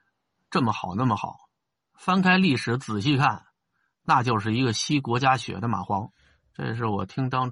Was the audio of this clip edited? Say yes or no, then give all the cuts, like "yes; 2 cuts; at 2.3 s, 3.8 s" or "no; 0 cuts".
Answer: no; 0 cuts